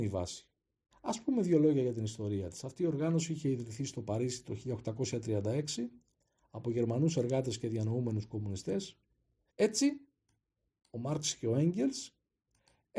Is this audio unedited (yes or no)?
no